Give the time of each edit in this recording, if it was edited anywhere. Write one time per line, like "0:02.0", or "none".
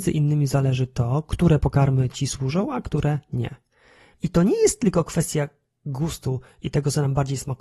0:04.1